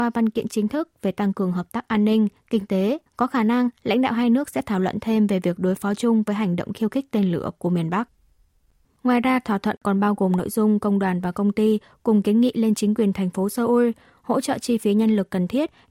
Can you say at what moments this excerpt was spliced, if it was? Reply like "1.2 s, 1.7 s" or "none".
3.1 s, 8.8 s

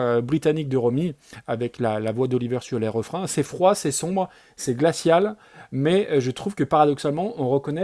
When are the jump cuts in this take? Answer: none

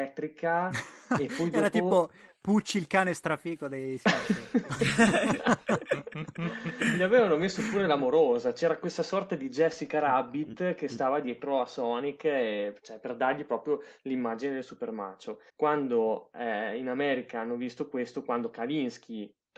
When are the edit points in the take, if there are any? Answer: 15.5 s

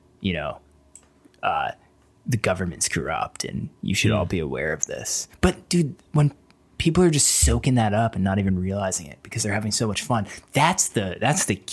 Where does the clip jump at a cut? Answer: none

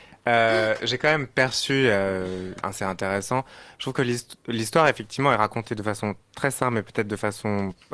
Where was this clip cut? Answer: 2.6 s

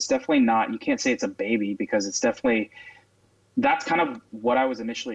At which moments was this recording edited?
none

